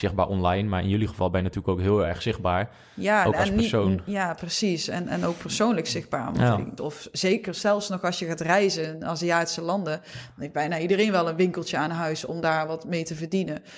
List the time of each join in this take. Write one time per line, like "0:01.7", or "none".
0:06.8